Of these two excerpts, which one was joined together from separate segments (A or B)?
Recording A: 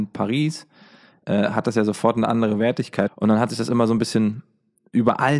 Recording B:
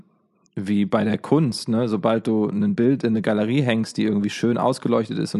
A